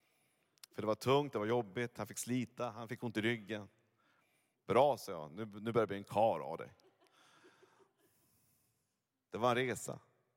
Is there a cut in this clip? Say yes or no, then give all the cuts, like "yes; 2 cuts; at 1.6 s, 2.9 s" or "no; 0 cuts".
no; 0 cuts